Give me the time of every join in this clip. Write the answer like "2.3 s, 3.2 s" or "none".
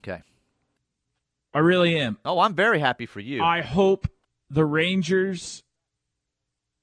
1.4 s